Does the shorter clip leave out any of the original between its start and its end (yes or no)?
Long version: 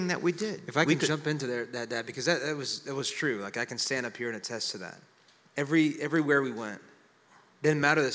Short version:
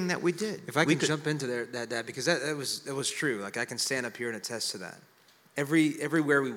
no